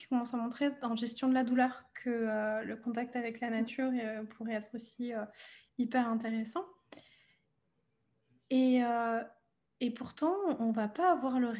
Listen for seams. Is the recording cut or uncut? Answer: uncut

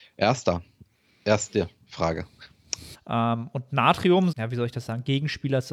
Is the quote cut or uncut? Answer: cut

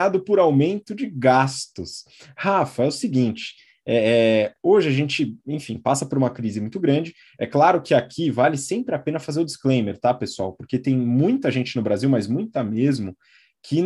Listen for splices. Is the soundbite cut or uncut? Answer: uncut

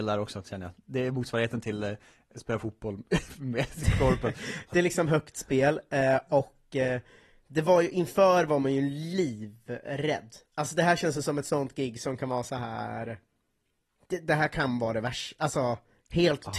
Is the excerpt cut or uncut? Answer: uncut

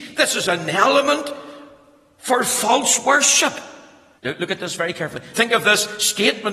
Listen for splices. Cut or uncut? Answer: cut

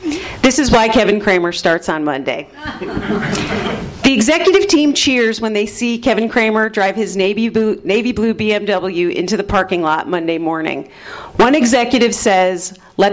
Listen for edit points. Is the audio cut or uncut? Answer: uncut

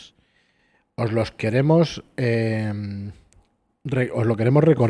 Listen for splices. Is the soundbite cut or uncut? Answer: uncut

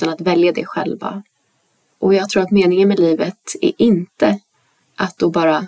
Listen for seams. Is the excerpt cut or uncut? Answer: cut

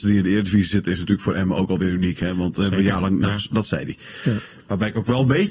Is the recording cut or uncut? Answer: uncut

